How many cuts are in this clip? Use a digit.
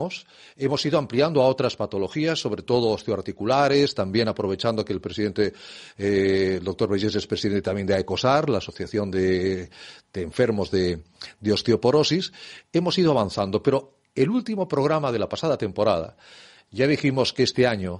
0